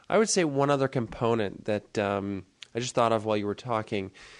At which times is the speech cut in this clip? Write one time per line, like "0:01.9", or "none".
none